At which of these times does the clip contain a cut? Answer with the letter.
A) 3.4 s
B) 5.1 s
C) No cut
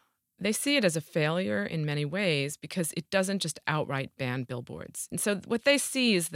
B